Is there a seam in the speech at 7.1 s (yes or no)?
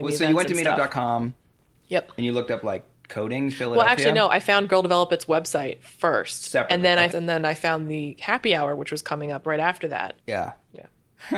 yes